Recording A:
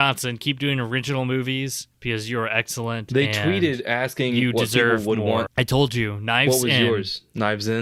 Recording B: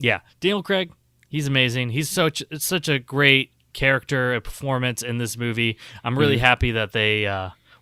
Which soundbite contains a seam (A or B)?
A